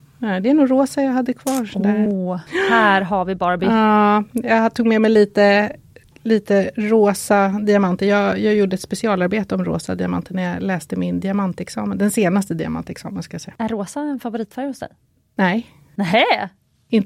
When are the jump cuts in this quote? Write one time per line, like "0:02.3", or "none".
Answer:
none